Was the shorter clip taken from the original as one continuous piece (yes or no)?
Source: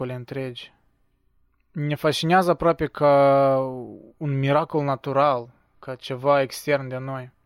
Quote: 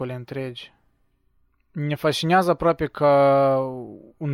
yes